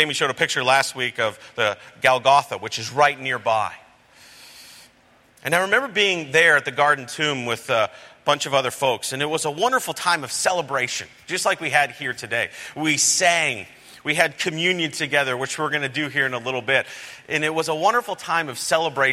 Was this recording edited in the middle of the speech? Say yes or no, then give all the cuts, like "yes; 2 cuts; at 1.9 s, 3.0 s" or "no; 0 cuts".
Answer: no; 0 cuts